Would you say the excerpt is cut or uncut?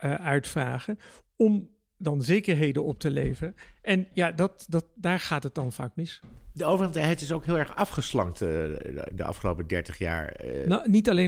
uncut